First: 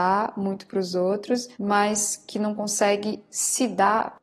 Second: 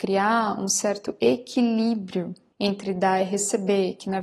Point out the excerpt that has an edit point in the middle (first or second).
first